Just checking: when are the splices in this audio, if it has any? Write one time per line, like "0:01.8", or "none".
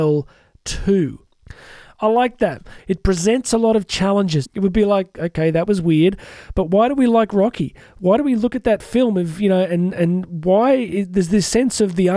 0:02.8
0:04.4